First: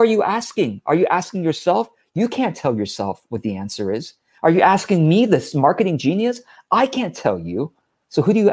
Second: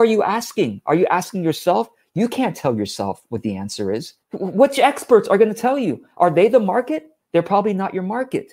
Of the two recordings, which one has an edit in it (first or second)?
second